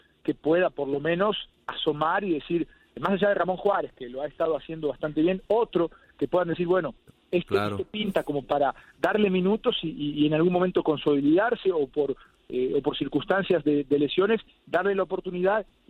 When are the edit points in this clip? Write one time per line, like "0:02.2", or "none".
none